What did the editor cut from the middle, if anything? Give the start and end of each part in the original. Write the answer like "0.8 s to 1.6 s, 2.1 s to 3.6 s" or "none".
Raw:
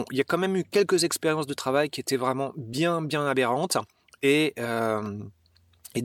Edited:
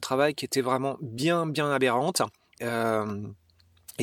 4.1 s to 4.5 s